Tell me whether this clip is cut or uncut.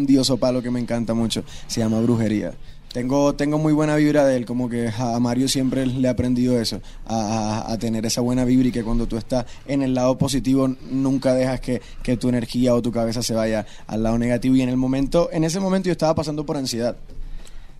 uncut